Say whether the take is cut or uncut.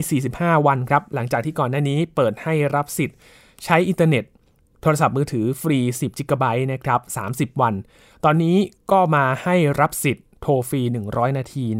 uncut